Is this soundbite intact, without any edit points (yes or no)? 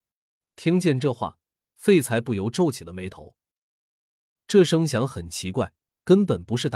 no